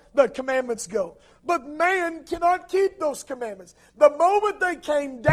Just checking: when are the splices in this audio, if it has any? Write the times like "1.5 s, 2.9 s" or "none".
none